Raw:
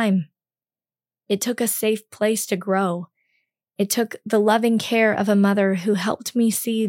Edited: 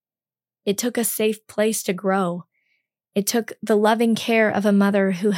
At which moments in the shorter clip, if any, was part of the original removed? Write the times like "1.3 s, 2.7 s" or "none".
none